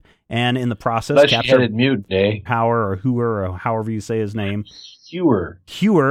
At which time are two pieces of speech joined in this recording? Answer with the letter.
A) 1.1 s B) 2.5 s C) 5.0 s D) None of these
B